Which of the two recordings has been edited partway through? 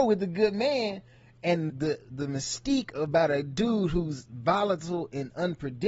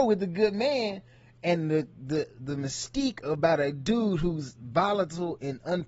first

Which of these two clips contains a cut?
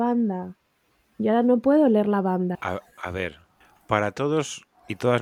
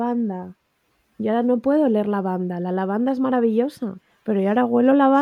first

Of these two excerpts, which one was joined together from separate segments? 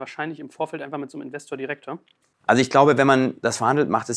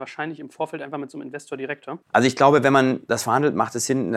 second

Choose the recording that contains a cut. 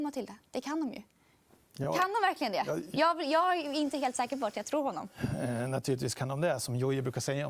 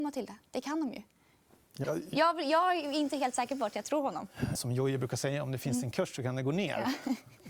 second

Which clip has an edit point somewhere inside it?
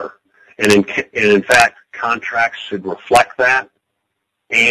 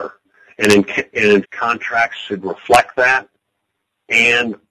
second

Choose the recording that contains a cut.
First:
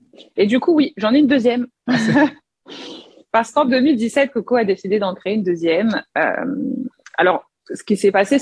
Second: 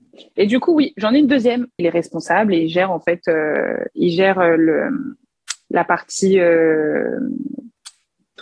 second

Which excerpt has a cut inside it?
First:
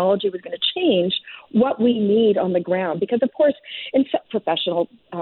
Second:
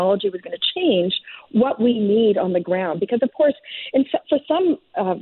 first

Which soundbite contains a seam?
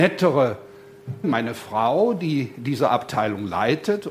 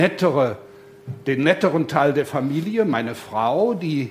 first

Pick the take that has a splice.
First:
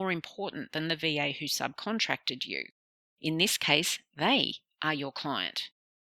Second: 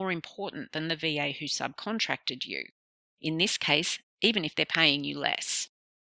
second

